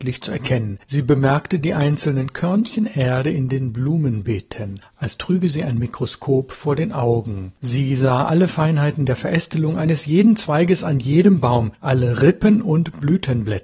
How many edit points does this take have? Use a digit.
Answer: 1